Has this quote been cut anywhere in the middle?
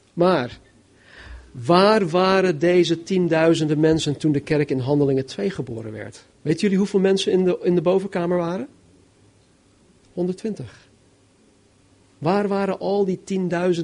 yes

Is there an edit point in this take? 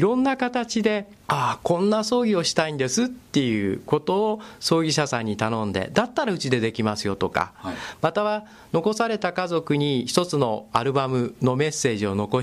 no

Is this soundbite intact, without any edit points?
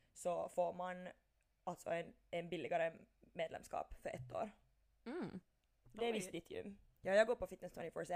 no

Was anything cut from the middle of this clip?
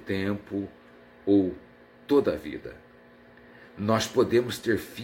no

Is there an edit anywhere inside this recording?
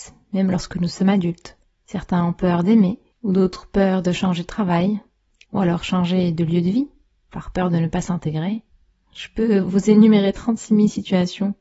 yes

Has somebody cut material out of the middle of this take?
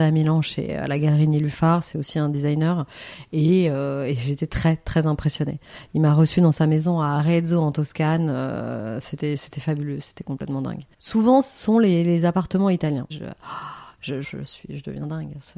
yes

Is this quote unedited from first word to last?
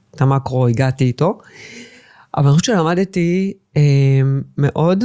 yes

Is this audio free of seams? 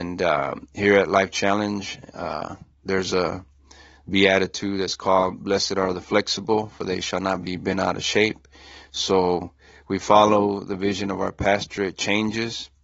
yes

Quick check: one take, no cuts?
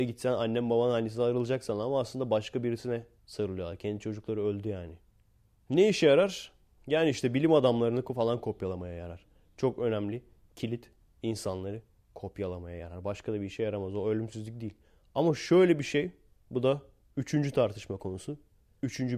yes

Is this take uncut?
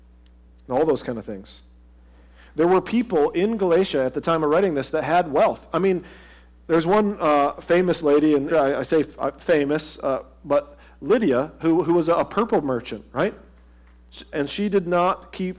no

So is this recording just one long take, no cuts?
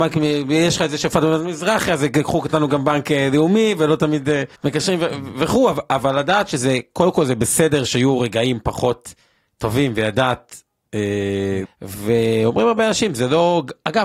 no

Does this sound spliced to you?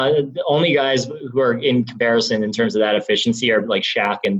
no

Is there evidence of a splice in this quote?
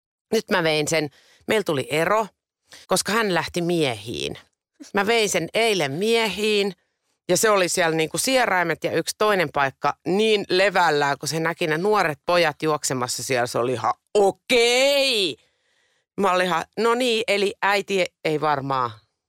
yes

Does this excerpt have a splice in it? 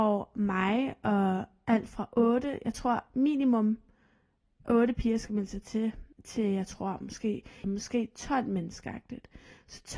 yes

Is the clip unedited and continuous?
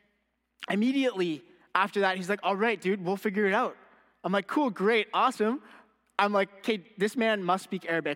yes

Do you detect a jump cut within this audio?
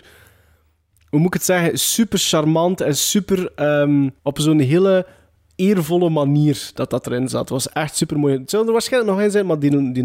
yes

